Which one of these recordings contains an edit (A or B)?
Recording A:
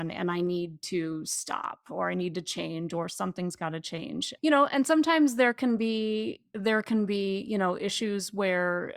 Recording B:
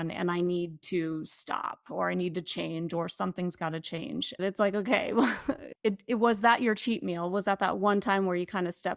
B